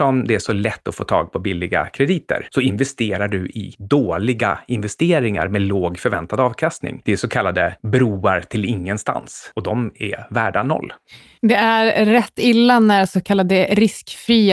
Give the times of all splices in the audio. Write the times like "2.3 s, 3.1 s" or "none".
7.0 s